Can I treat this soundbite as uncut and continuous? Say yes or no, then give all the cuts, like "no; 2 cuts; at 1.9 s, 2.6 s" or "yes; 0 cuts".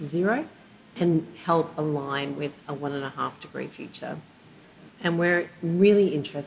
no; 1 cut; at 4.9 s